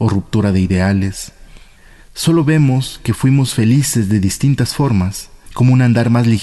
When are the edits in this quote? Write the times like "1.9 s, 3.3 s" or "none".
5.5 s